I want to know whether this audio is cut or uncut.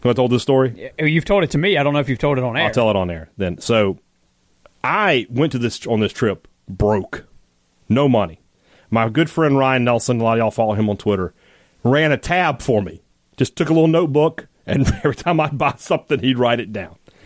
uncut